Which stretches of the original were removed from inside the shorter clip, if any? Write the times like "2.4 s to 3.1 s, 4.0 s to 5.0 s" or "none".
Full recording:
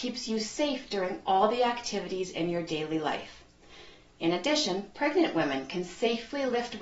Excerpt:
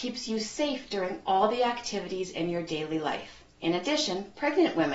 3.5 s to 4.1 s